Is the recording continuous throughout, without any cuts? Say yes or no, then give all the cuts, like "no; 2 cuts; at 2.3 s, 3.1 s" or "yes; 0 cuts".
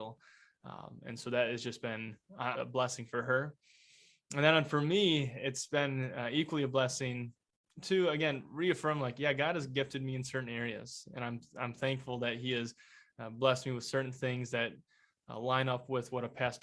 no; 1 cut; at 2.5 s